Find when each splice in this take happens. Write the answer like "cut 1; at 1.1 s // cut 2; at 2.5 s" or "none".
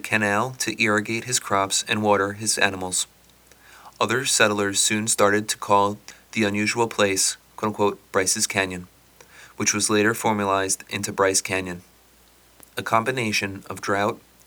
none